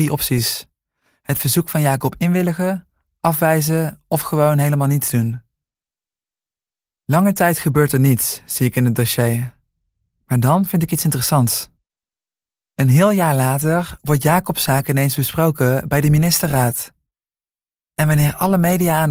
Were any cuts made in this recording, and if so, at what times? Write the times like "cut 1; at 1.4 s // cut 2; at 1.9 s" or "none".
none